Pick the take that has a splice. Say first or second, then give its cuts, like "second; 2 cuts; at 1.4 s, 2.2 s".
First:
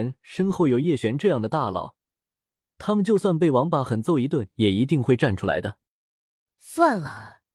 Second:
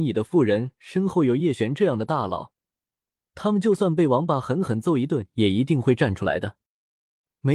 first; 2 cuts; at 3.9 s, 6.5 s